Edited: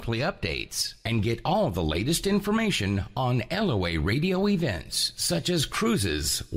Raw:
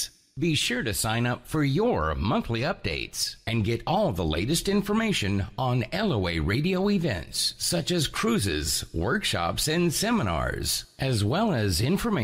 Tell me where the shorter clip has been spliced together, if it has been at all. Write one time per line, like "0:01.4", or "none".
none